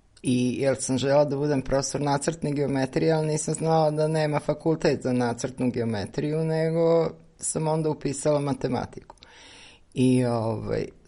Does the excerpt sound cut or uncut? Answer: uncut